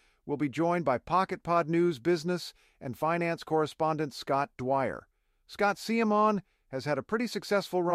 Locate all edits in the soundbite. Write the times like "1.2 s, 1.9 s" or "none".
none